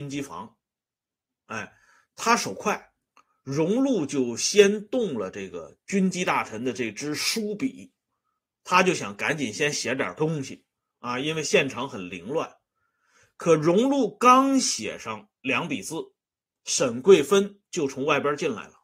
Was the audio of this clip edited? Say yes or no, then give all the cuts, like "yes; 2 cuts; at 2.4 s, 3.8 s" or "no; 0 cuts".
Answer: no; 0 cuts